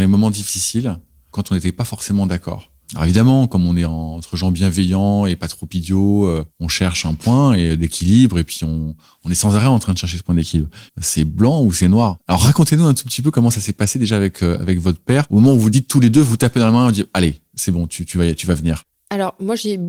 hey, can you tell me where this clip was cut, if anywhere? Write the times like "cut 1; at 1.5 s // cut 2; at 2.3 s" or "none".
cut 1; at 10.9 s